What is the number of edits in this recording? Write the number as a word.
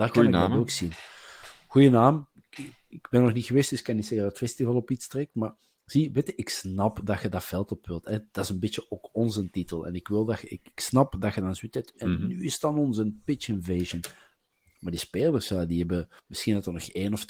zero